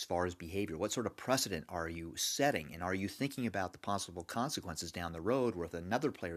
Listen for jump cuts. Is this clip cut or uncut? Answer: uncut